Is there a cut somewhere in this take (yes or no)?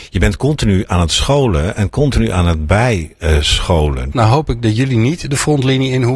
yes